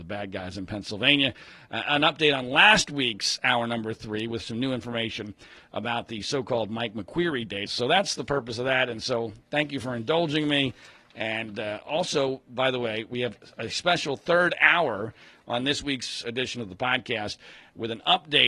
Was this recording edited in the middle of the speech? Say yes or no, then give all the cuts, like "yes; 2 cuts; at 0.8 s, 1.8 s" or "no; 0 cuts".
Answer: yes; 1 cut; at 7.7 s